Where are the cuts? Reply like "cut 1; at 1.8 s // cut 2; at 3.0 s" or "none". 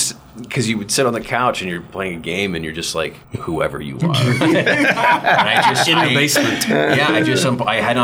cut 1; at 3.2 s